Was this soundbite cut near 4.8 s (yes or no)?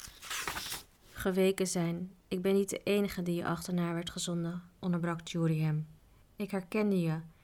yes